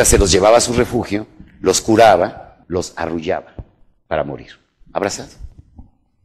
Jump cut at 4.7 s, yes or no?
no